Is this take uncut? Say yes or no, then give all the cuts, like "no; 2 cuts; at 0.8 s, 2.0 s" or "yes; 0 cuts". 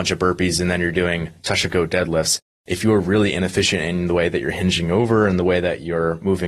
yes; 0 cuts